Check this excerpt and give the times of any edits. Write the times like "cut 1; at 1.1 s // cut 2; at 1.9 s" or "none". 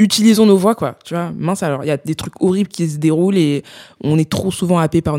none